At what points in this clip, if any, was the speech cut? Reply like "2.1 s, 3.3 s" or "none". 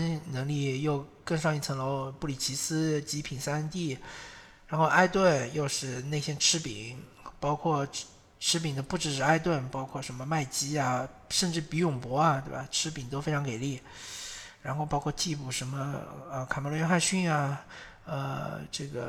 none

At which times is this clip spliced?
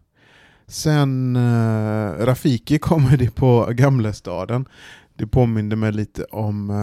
none

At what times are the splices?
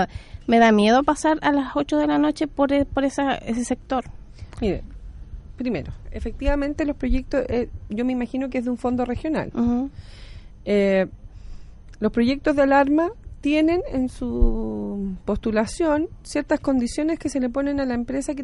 6.1 s

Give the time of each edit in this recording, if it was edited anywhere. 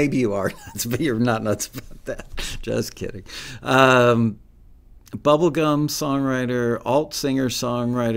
5.1 s

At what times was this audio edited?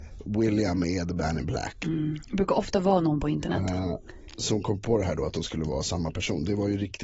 2.2 s

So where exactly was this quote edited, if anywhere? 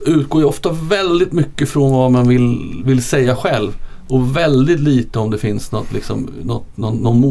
none

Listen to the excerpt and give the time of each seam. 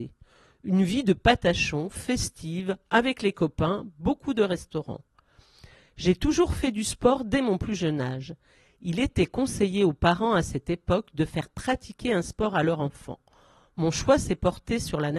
none

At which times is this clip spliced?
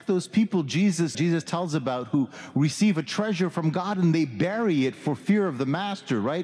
1.1 s

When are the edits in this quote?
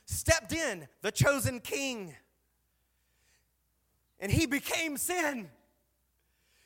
none

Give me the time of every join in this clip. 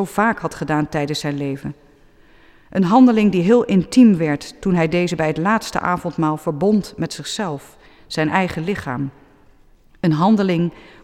none

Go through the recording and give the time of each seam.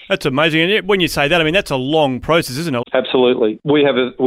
2.8 s

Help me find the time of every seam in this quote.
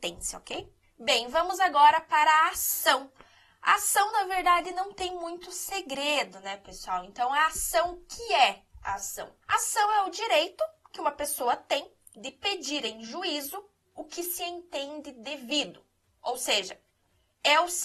9.4 s

